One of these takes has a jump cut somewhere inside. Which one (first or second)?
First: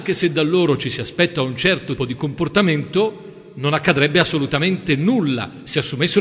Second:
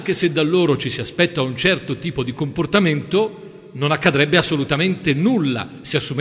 first